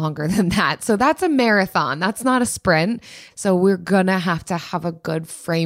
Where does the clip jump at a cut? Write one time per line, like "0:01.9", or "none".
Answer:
0:03.3